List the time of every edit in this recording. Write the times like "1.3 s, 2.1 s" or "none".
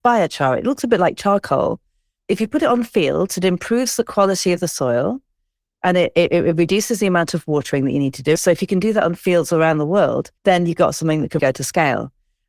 8.4 s, 10.4 s, 11.4 s